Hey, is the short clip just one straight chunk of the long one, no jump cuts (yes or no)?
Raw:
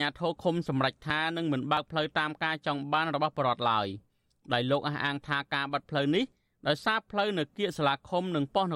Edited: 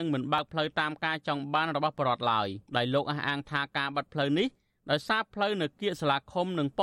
no